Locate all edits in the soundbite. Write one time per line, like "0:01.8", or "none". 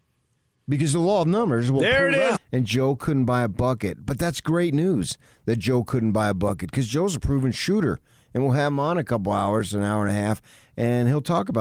0:02.4